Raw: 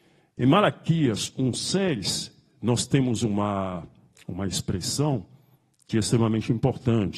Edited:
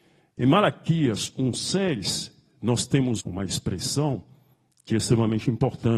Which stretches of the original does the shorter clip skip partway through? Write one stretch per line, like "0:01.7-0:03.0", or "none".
0:03.2-0:04.2